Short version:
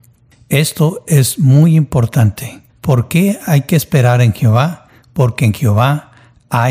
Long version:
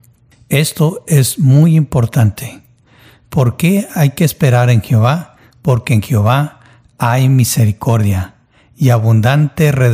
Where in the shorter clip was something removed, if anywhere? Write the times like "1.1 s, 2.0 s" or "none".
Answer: 2.7 s